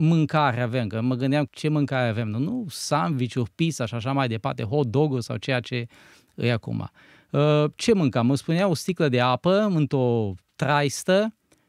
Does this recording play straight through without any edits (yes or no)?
no